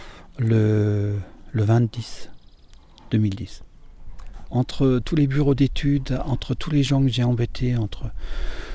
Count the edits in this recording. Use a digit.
1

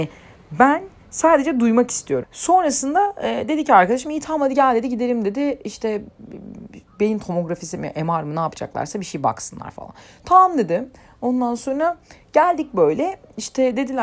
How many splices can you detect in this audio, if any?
1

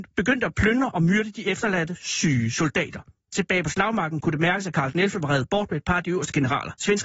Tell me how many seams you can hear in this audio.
0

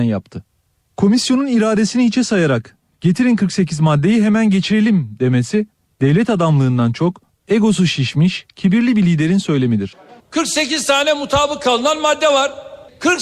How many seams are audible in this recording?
1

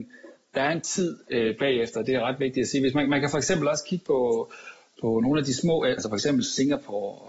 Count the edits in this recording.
1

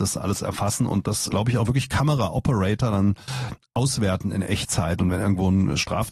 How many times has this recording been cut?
1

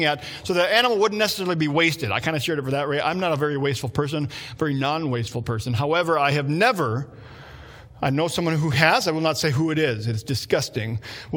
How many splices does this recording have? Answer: 0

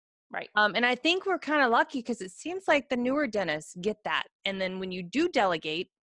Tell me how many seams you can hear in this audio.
1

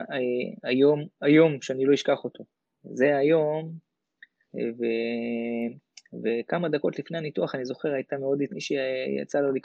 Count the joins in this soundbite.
2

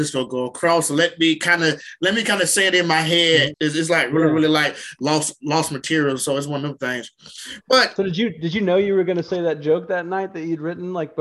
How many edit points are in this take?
1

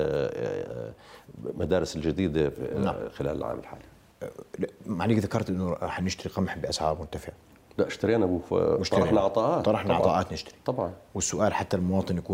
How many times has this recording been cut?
0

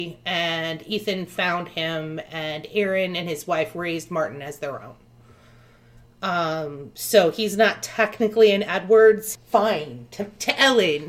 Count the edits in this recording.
1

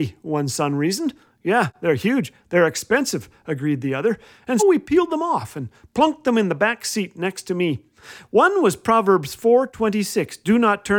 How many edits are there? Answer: 1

